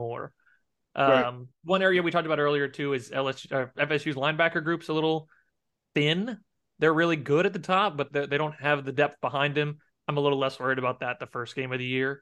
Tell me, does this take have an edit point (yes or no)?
no